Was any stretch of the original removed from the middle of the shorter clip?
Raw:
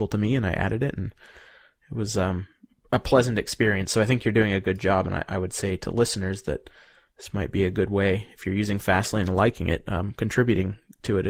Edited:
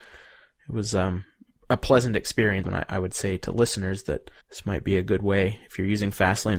yes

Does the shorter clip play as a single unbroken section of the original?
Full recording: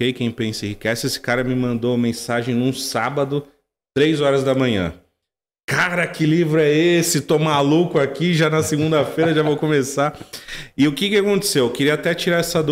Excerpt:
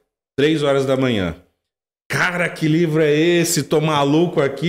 yes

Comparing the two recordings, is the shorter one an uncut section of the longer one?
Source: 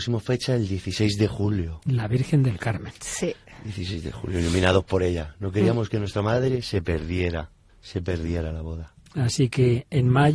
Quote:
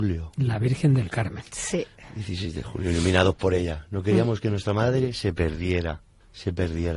yes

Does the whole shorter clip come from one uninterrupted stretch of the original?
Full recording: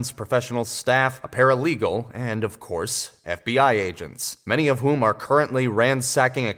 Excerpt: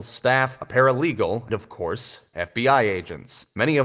no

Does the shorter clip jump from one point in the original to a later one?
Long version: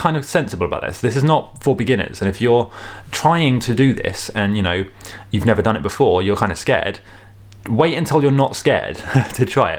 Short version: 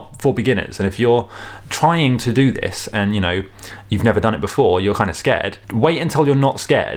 yes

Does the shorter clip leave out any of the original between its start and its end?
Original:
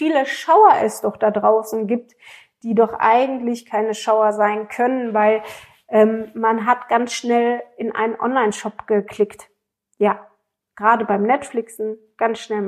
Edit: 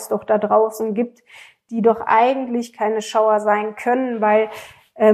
no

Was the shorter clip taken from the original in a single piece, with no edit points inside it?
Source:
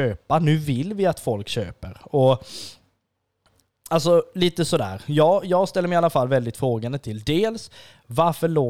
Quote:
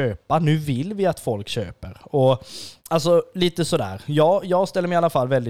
no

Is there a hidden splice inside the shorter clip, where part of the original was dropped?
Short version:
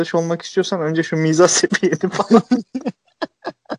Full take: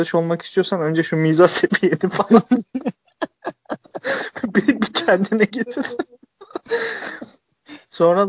no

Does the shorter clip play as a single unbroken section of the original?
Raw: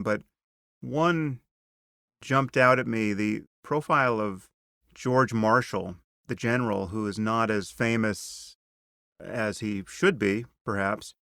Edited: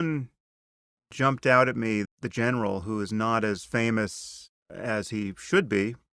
no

